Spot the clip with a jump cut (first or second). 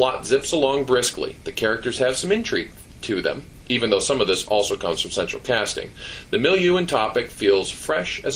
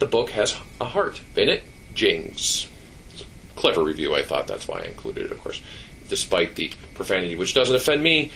second